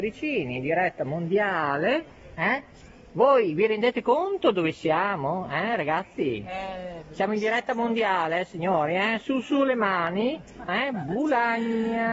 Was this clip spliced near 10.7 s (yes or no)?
yes